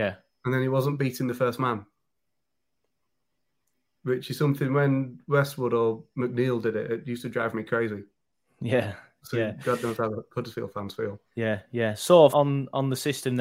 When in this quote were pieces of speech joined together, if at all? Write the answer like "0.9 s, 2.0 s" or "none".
11.2 s, 12.3 s